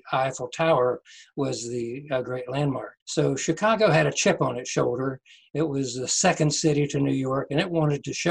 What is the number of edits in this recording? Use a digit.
1